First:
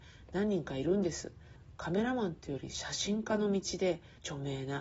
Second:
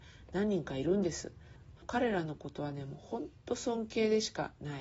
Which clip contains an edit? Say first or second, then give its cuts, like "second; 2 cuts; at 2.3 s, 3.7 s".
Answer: second; 1 cut; at 1.8 s